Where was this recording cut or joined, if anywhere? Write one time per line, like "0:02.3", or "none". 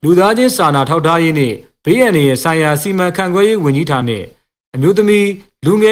0:04.0